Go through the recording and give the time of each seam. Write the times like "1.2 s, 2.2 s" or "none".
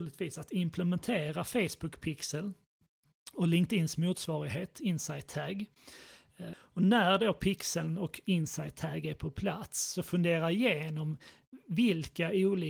6.5 s